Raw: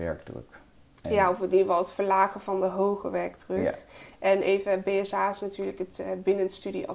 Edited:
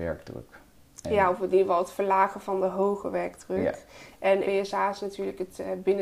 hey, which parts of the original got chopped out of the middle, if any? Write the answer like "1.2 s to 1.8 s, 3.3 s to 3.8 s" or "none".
4.4 s to 4.8 s